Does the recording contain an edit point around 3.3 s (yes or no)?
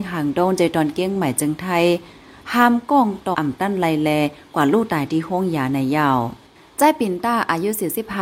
yes